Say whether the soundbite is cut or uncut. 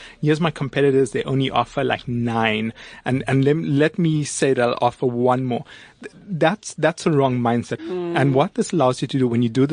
cut